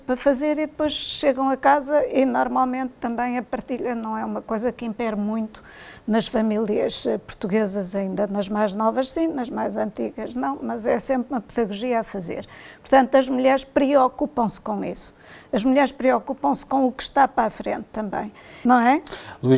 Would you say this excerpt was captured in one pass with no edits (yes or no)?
no